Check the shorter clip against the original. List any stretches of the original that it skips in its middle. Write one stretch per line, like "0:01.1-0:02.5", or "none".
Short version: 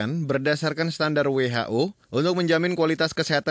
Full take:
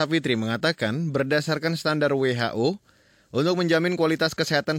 0:02.9-0:03.2